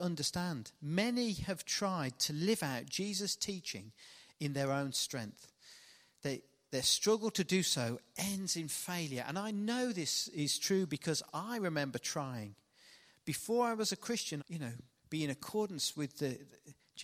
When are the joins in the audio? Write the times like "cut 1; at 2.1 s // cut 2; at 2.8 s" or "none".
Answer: cut 1; at 14.4 s